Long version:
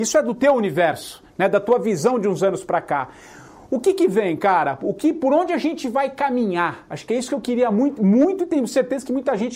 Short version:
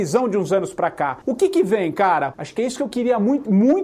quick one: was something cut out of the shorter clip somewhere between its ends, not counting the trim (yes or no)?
yes